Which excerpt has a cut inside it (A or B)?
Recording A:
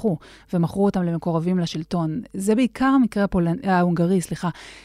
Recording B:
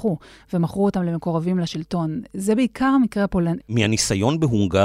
B